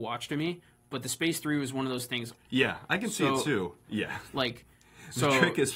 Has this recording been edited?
yes; 2 cuts; at 2.3 s, 3.9 s

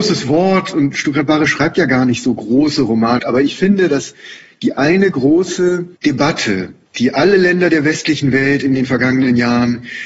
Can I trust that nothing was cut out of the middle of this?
no; 2 cuts; at 3.2 s, 6.0 s

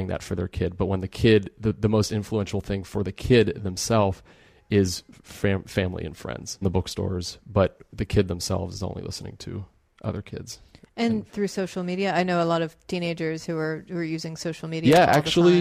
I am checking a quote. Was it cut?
yes; 2 cuts; at 6.6 s, 11.3 s

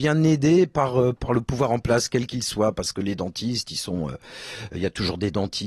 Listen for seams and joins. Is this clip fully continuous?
no; 1 cut; at 1.2 s

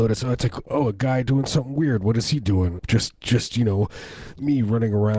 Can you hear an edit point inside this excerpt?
yes; 1 cut; at 2.8 s

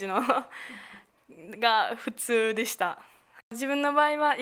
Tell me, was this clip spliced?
yes; 1 cut; at 3.4 s

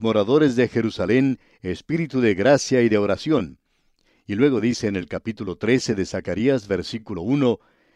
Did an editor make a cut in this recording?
no; 0 cuts

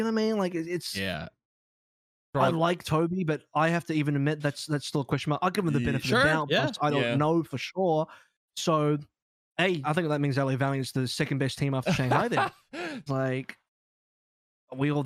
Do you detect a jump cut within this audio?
yes; 2 cuts; at 9.8 s, 13.1 s

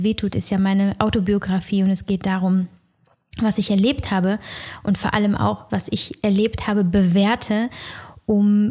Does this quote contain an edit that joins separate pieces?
yes; 1 cut; at 5.7 s

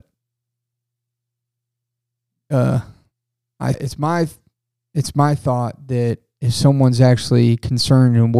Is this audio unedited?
no; 1 cut; at 3.7 s

